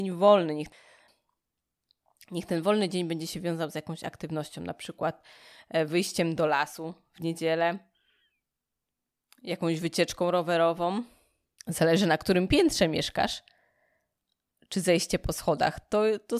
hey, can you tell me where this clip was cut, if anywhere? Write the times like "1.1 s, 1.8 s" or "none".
11.6 s